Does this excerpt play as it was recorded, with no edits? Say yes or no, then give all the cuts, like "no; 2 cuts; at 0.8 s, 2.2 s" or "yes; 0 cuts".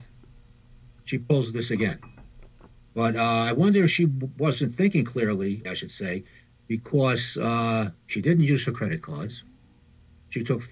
no; 3 cuts; at 2.9 s, 5.6 s, 8.0 s